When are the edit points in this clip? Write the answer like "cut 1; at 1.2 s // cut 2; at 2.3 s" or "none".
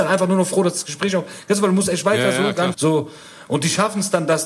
cut 1; at 2.7 s